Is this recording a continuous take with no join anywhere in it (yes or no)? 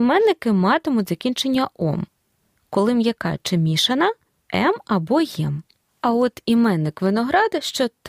no